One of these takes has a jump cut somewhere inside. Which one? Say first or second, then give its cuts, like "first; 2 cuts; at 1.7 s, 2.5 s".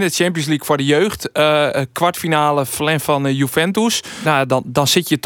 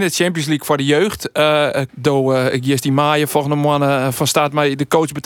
second; 1 cut; at 1.9 s